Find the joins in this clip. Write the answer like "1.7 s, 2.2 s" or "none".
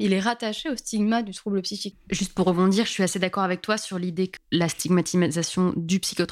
1.9 s, 4.4 s